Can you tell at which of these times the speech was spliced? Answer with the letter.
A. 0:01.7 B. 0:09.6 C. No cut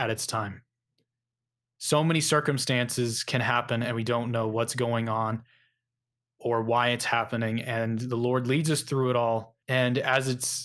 B